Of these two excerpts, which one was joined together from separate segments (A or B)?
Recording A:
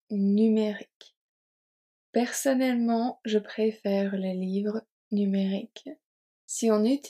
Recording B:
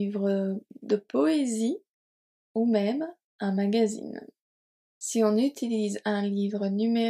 B